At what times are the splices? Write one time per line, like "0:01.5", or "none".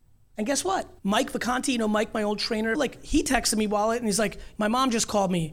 0:01.0
0:02.7
0:04.5